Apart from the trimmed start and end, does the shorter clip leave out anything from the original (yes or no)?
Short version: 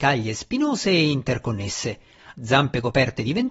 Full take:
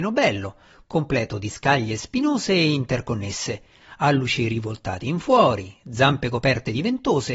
yes